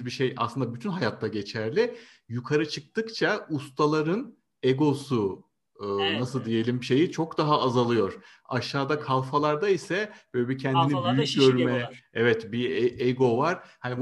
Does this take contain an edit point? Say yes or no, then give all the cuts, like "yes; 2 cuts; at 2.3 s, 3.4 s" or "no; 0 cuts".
no; 0 cuts